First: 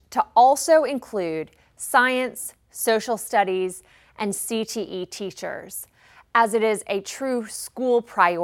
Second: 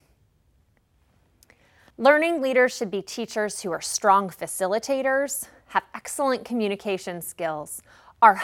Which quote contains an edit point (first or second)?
second